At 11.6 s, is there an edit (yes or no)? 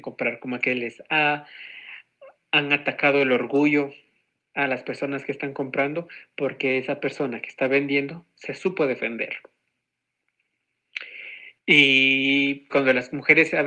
yes